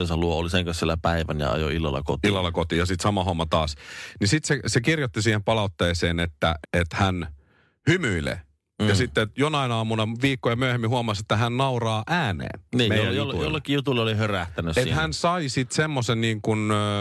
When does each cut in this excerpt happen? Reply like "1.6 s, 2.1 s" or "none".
6.6 s